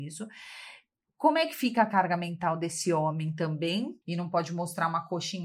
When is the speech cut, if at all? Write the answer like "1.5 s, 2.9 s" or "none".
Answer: 4.0 s